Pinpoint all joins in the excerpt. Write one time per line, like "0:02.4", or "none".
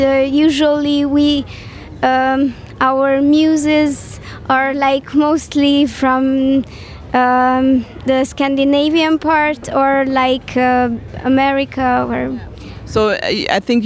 none

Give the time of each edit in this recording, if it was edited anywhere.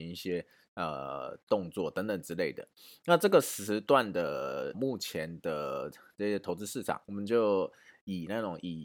0:04.7
0:07.0

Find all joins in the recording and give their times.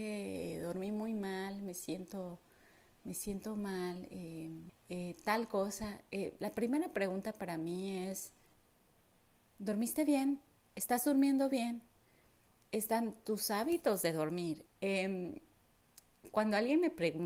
0:04.7
0:14.7

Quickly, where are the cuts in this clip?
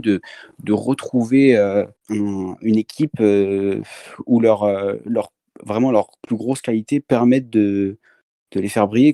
0:02.0

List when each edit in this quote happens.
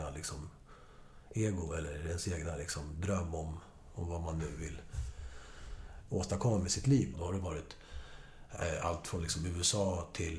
0:07.1

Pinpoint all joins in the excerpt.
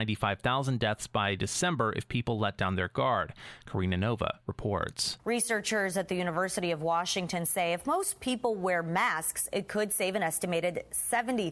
none

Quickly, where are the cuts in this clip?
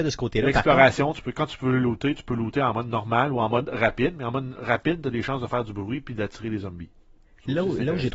none

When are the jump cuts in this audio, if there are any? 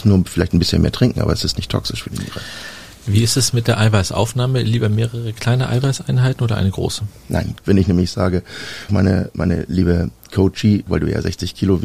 0:07.6
0:08.9
0:10.9

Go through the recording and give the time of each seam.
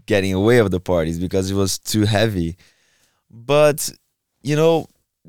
none

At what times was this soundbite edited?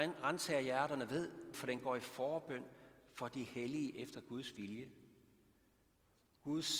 0:01.5

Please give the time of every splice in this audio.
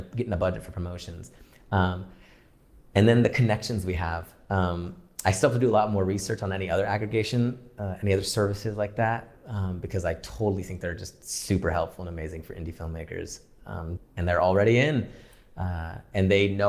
0:14.0

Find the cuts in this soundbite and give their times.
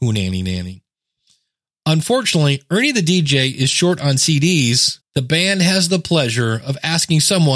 0:05.0

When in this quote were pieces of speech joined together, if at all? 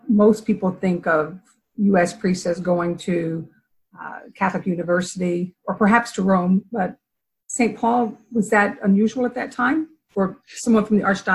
0:05.6

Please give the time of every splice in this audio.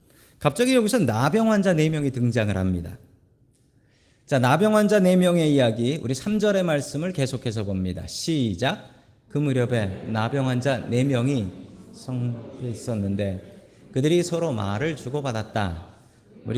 none

